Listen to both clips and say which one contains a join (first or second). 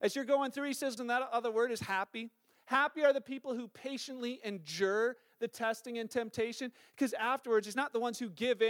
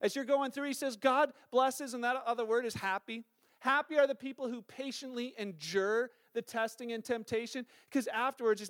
first